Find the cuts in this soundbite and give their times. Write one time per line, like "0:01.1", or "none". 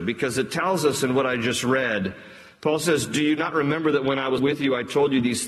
0:04.4